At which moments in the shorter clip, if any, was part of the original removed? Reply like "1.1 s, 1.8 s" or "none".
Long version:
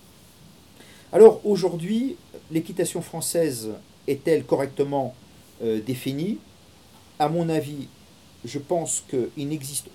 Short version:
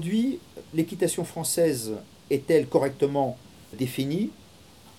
3.7 s